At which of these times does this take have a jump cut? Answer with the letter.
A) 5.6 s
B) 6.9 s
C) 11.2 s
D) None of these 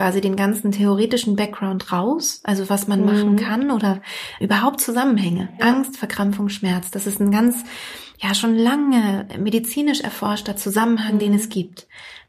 A